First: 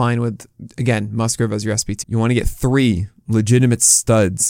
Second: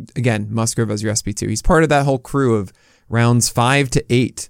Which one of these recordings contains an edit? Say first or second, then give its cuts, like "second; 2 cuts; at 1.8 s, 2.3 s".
first; 1 cut; at 2.0 s